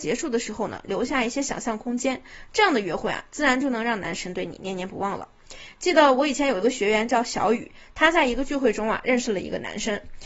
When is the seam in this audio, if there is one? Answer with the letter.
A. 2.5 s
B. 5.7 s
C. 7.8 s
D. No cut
D